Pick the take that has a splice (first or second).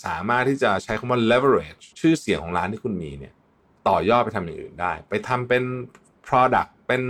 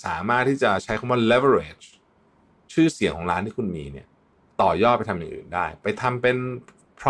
first